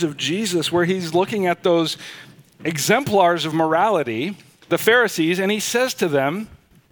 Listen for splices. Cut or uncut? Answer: uncut